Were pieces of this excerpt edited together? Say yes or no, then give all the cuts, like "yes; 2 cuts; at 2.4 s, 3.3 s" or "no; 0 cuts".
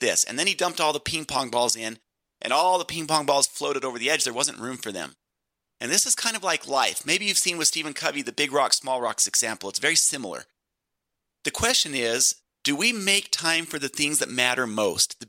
no; 0 cuts